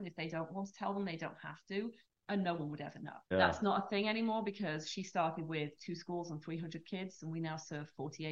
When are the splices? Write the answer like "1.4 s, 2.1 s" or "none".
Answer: 3.3 s